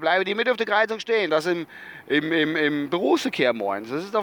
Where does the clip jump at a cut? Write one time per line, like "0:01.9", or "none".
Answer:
0:01.3

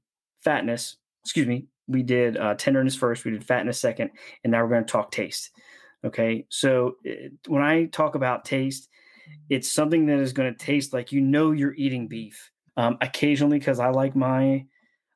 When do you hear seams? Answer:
0:12.7

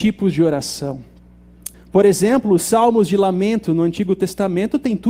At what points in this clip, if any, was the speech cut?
0:01.7

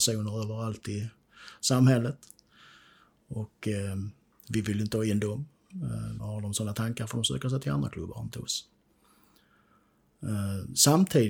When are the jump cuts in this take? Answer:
0:06.2

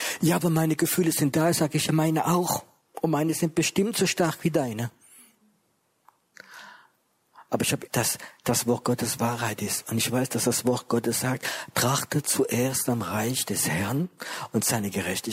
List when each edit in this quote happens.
0:07.9

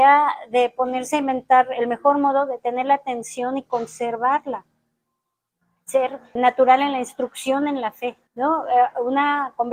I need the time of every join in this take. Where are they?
0:06.4
0:08.3

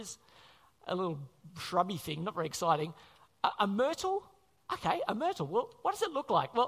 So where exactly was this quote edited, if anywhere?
none

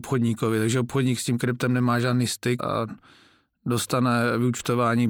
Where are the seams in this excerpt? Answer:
0:02.6

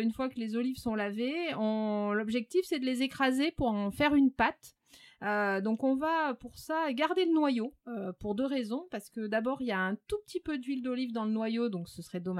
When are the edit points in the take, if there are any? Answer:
none

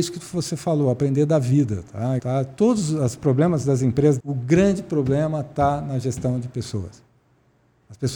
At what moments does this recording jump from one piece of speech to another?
0:02.2
0:04.2

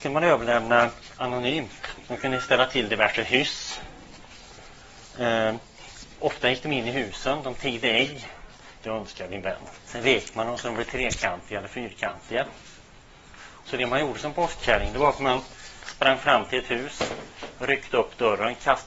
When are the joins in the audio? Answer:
0:02.0
0:08.8
0:13.6

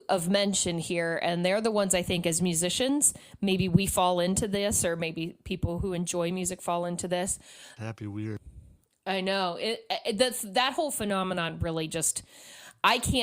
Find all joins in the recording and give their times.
0:07.8

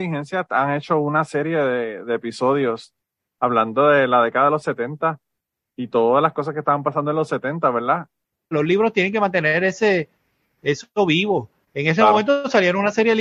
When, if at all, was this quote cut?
0:08.5

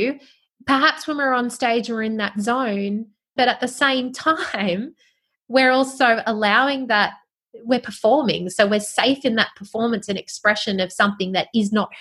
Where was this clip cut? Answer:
0:03.4

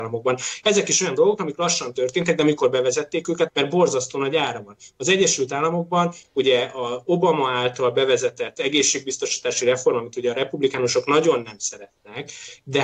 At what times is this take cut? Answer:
0:03.5

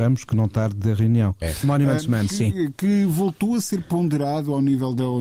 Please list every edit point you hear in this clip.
0:01.4

